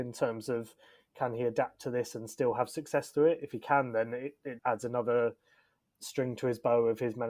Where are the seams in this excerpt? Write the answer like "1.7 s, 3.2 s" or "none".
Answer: 4.6 s